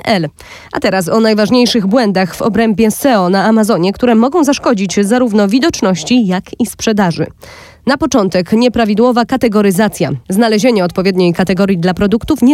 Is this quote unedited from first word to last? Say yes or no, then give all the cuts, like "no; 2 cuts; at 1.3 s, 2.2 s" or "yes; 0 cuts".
yes; 0 cuts